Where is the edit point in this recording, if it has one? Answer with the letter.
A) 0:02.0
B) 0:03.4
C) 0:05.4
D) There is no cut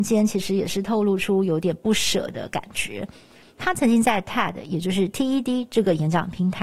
B